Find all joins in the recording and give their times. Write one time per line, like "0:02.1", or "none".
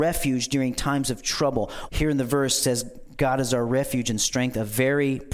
0:01.9

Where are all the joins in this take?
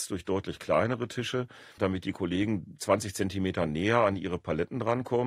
0:01.8

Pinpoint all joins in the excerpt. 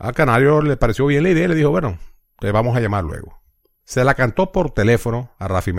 0:03.8

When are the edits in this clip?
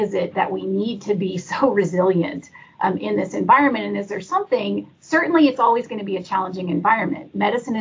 none

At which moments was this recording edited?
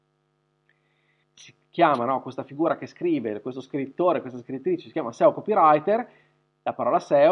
0:01.2

